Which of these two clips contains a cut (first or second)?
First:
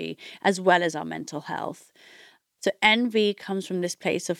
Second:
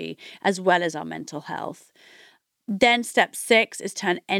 first